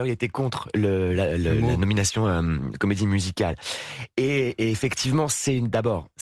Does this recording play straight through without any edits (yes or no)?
yes